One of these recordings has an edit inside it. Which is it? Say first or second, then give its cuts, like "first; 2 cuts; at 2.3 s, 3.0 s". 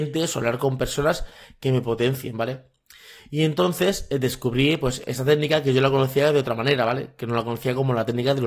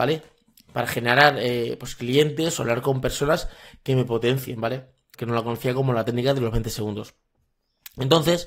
second; 1 cut; at 5.1 s